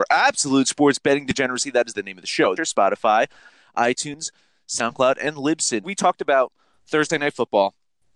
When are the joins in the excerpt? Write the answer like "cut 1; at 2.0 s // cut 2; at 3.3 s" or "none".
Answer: cut 1; at 2.6 s // cut 2; at 5.8 s